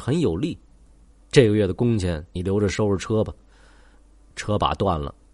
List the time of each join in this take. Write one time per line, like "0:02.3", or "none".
0:01.2